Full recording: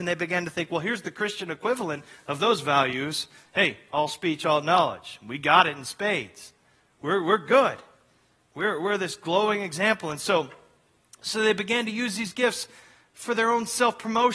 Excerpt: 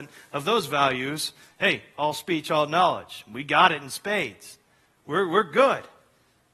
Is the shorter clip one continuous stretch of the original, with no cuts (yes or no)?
yes